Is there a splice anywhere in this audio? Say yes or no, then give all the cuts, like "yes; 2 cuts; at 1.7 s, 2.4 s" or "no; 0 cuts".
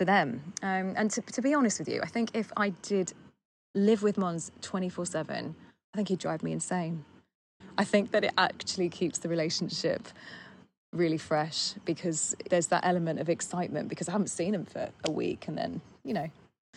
yes; 1 cut; at 12.5 s